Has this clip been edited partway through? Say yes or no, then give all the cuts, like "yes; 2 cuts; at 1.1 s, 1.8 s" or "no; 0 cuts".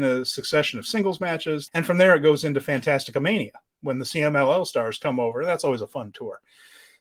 yes; 1 cut; at 1.7 s